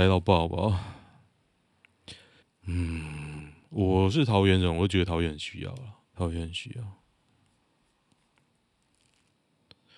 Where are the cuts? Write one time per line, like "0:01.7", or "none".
0:02.4
0:06.0